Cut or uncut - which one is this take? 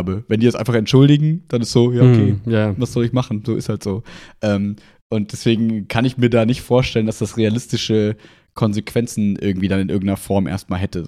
uncut